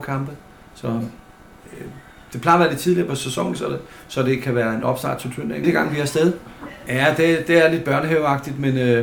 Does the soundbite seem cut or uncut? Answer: cut